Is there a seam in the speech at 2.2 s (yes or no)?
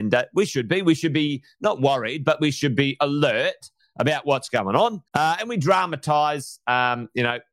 no